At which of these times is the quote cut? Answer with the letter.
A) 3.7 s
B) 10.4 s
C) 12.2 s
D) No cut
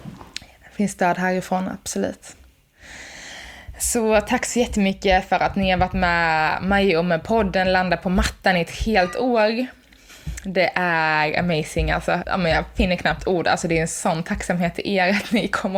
C